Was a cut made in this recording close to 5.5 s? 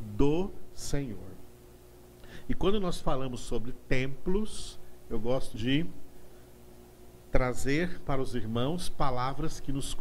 yes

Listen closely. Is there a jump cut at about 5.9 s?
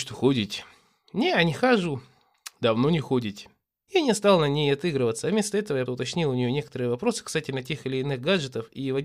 yes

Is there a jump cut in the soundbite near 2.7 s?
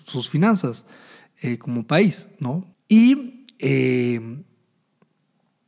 yes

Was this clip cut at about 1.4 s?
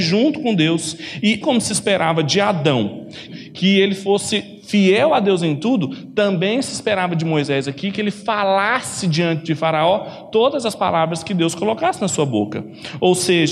yes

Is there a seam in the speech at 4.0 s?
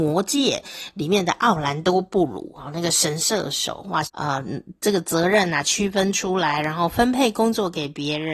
yes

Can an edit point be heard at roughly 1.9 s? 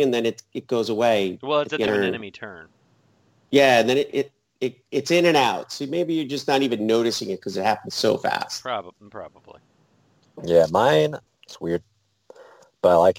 yes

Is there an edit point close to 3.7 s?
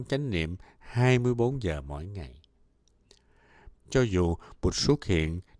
yes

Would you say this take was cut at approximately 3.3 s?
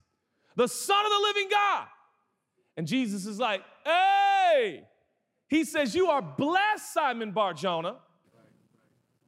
no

